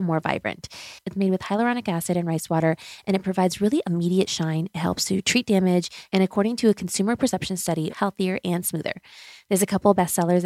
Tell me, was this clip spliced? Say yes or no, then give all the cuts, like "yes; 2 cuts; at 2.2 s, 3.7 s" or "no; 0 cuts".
yes; 2 cuts; at 6.1 s, 7.9 s